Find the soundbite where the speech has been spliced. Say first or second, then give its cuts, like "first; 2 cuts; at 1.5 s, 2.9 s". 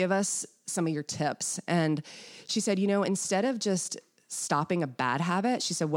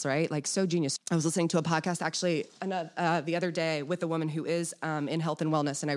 second; 1 cut; at 1.0 s